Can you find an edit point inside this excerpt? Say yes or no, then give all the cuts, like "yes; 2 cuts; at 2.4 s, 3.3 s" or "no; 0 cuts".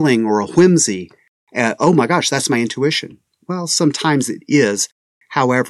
no; 0 cuts